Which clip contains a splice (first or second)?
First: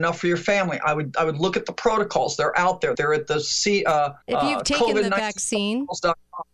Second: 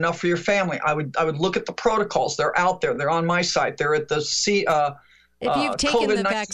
first